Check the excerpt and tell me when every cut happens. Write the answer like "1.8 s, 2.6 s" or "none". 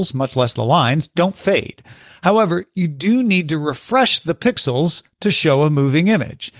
none